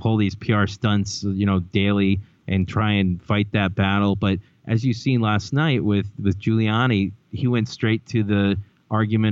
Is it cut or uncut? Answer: uncut